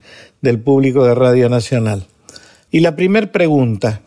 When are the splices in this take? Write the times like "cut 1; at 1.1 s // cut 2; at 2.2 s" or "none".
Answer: cut 1; at 2.7 s